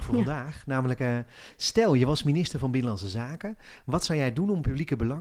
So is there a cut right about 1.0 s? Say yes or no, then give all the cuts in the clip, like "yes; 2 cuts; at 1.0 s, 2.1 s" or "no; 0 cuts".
no; 0 cuts